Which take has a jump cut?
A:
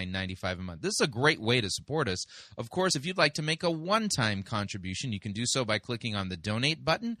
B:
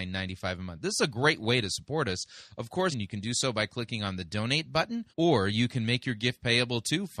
B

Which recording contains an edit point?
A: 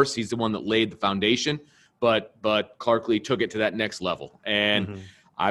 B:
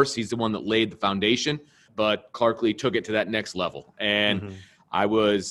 B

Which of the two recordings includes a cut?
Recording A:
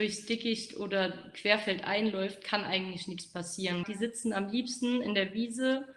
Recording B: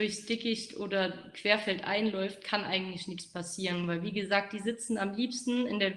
A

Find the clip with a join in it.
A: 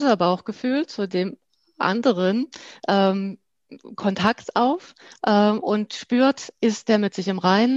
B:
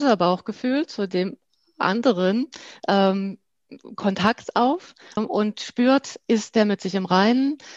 B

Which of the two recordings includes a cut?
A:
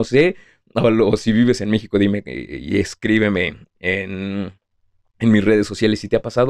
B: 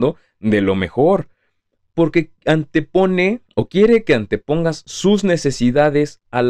B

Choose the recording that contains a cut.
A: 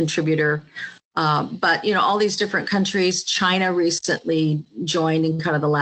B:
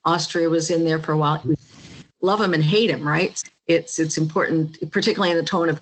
B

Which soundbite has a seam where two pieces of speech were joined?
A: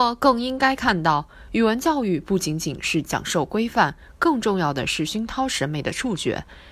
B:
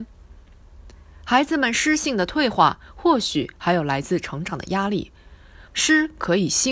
B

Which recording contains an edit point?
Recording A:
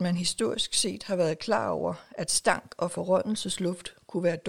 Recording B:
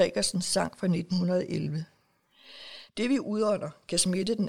B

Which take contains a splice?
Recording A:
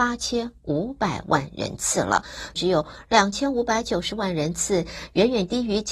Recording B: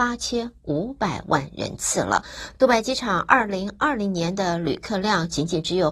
A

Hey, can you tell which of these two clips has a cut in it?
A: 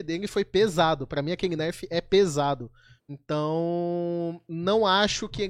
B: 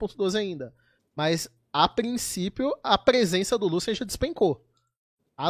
A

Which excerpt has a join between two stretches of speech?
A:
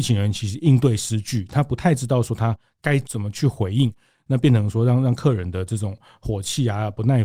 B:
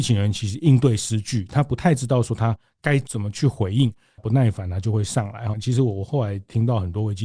B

